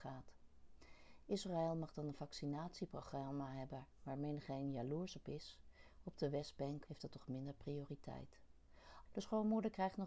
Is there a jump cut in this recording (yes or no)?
yes